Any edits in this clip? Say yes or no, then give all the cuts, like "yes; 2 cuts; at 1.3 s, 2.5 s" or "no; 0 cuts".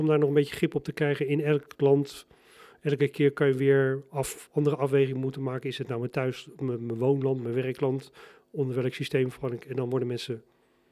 no; 0 cuts